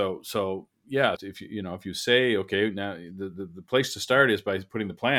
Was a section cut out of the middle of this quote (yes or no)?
yes